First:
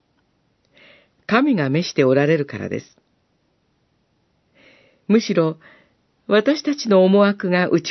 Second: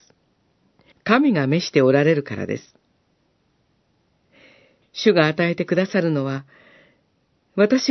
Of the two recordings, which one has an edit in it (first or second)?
second